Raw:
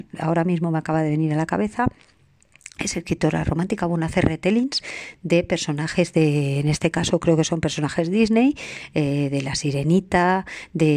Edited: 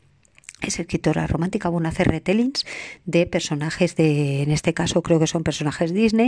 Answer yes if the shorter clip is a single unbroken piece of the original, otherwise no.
yes